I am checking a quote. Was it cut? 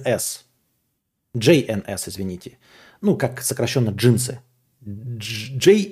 no; 0 cuts

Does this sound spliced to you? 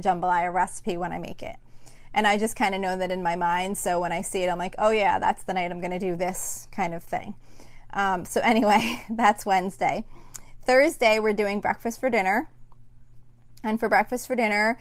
no; 0 cuts

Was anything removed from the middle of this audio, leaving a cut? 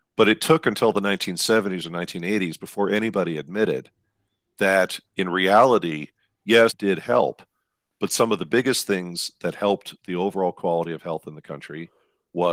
yes; 1 cut; at 6.7 s

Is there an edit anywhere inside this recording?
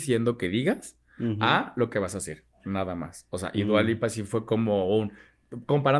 no; 0 cuts

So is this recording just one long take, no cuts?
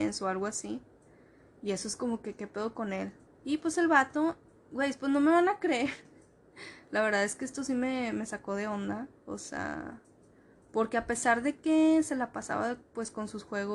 no; 1 cut; at 3.3 s

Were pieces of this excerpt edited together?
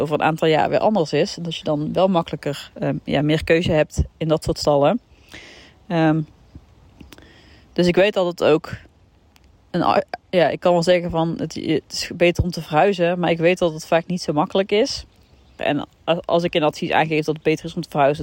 yes; 1 cut; at 15.6 s

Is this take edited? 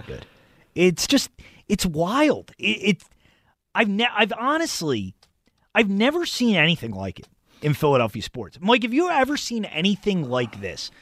no; 0 cuts

